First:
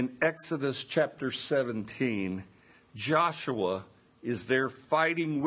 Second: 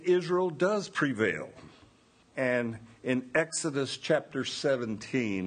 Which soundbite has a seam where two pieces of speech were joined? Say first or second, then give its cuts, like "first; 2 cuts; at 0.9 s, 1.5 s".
second; 1 cut; at 2.2 s